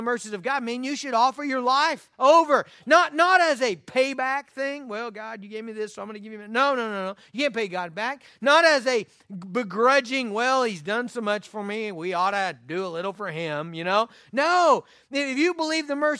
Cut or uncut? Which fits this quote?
uncut